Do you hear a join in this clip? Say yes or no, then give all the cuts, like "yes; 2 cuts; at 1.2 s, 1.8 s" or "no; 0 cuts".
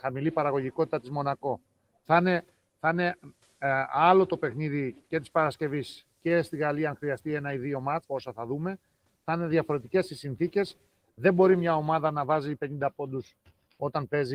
yes; 1 cut; at 8.0 s